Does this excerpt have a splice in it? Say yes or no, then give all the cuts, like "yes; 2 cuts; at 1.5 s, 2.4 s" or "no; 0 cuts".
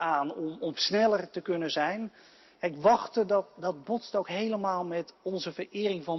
no; 0 cuts